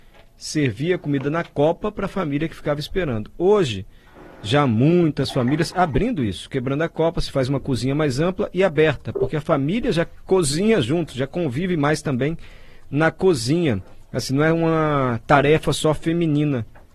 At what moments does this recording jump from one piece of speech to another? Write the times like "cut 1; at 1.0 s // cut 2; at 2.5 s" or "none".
none